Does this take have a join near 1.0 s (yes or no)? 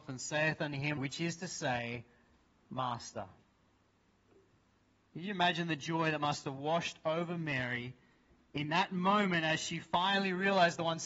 yes